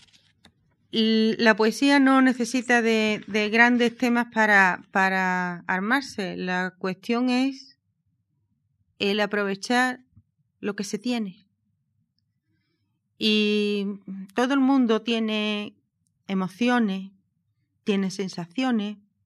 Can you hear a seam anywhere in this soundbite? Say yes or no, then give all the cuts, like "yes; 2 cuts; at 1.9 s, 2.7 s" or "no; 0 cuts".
no; 0 cuts